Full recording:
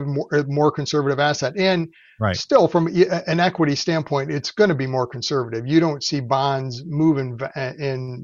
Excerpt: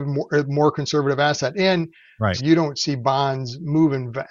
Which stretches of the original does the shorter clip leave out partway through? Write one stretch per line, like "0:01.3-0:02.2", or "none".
0:02.4-0:05.6